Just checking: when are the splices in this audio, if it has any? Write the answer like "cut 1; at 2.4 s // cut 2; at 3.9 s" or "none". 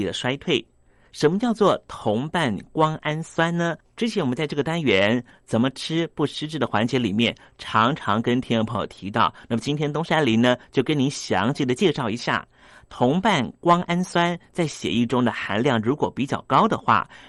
none